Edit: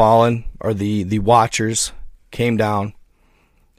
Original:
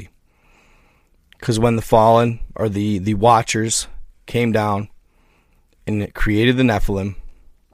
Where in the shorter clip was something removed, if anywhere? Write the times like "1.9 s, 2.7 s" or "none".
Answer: none